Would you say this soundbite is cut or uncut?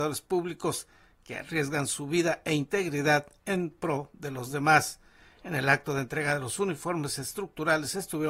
uncut